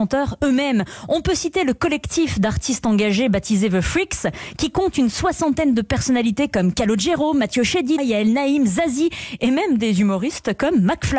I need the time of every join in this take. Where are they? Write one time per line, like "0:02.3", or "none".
0:08.0